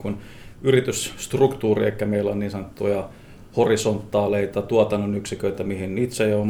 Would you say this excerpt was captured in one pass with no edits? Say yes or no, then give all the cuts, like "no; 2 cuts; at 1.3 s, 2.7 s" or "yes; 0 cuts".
yes; 0 cuts